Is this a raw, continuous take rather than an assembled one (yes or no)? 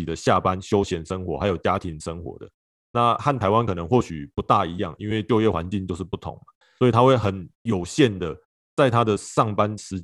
yes